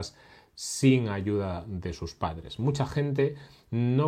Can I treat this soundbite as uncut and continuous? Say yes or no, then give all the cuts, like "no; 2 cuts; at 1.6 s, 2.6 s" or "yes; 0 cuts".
yes; 0 cuts